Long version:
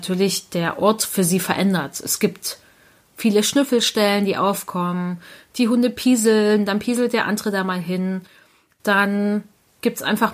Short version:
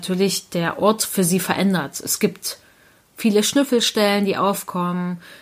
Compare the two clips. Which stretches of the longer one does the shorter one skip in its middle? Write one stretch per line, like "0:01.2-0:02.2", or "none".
none